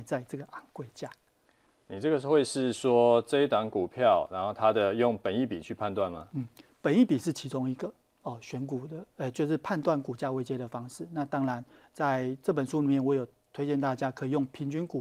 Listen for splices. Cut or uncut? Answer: uncut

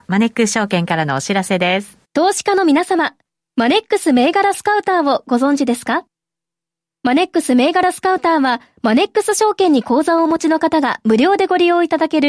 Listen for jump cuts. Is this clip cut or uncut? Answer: cut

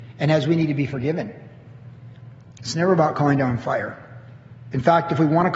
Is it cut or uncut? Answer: uncut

